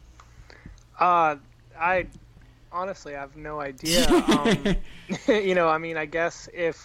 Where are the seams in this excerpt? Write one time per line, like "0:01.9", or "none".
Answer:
none